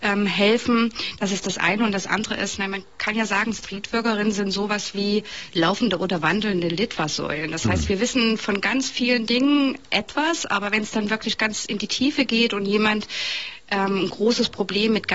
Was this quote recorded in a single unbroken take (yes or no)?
yes